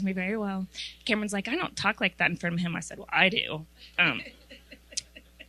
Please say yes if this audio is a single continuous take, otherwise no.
yes